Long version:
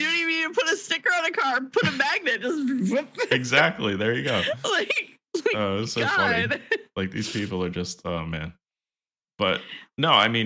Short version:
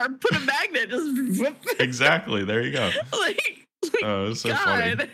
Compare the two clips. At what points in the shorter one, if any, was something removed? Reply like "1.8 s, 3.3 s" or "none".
none